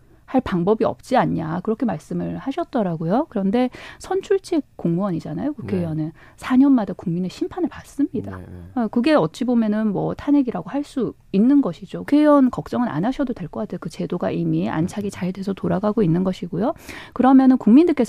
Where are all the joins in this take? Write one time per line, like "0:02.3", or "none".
0:12.1